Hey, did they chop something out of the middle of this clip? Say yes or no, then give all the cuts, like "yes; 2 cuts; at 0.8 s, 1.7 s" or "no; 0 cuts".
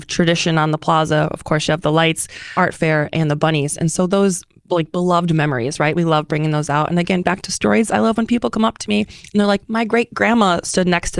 no; 0 cuts